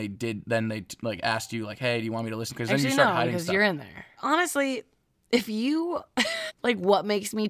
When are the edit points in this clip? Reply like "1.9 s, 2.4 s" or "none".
2.5 s, 4.2 s, 6.5 s